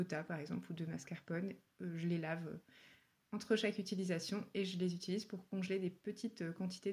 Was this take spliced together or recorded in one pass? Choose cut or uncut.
uncut